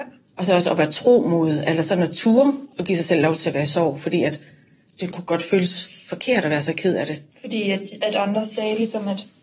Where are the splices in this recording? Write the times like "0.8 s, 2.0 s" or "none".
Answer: 7.3 s